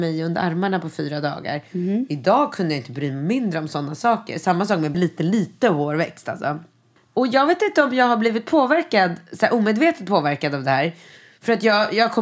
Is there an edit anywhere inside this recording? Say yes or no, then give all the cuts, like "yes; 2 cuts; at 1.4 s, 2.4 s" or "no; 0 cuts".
yes; 2 cuts; at 4.9 s, 7.0 s